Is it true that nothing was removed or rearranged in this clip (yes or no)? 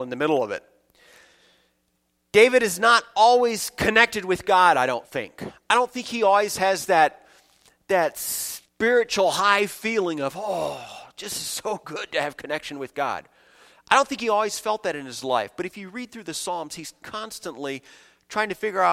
no